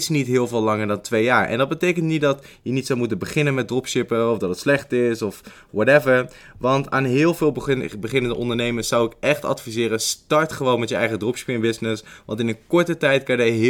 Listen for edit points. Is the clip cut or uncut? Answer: uncut